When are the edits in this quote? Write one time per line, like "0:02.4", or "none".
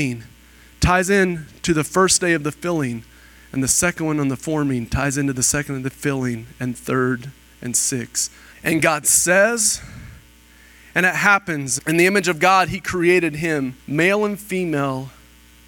0:08.5
0:11.8
0:13.8